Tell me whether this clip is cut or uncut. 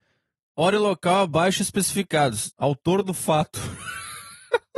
cut